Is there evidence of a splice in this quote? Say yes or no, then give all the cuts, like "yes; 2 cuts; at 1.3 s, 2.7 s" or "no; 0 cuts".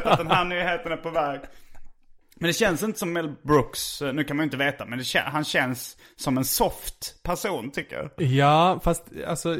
no; 0 cuts